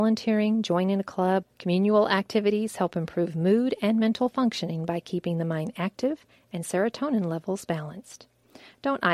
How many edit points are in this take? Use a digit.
1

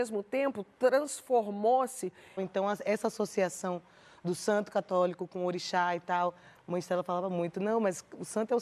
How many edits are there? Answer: 1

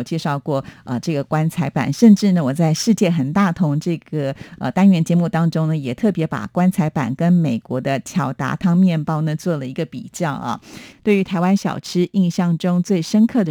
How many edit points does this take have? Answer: 1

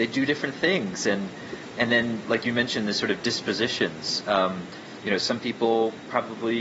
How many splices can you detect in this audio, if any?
0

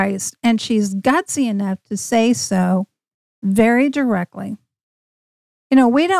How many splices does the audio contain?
0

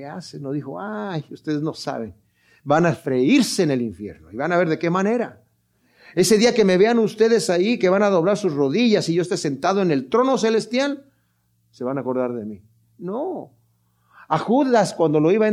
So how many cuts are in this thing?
0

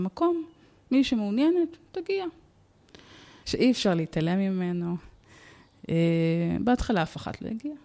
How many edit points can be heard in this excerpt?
1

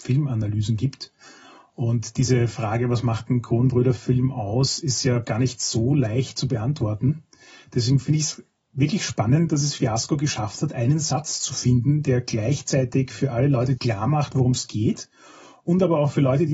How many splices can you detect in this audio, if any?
1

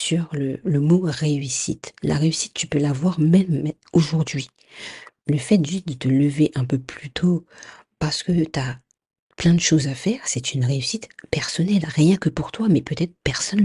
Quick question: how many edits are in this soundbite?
0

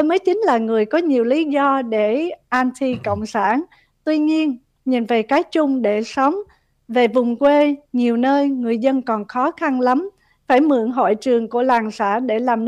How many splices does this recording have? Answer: 1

